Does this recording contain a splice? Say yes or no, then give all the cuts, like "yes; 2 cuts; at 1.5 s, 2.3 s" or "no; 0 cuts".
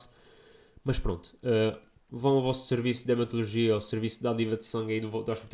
yes; 1 cut; at 2.1 s